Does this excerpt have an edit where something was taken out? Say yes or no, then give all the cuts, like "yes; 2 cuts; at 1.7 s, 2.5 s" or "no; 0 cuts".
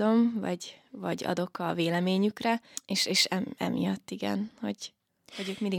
no; 0 cuts